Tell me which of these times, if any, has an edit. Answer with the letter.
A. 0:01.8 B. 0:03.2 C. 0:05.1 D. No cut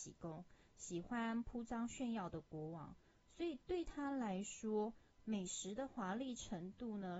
D